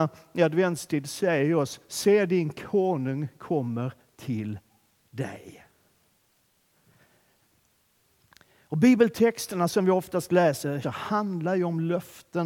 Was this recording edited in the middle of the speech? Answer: yes; 1 cut; at 10.8 s

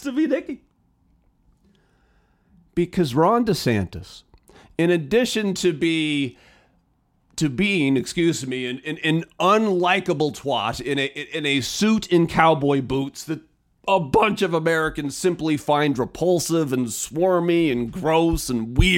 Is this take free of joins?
yes; 0 cuts

